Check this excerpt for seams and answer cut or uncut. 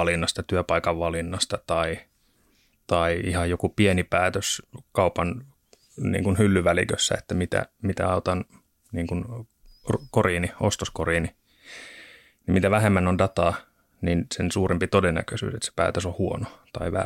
uncut